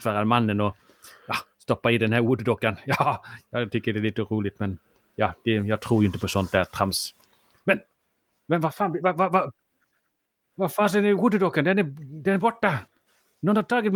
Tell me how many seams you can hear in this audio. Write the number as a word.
zero